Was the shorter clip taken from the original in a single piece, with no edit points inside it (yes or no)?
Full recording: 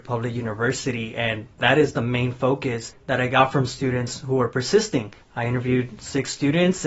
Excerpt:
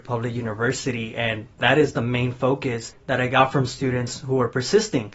yes